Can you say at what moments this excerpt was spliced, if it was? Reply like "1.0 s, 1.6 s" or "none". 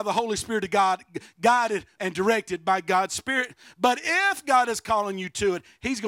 2.0 s